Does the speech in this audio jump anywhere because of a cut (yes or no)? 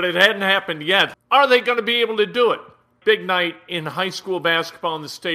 yes